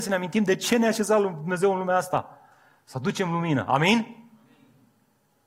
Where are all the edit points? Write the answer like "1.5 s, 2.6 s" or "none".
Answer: none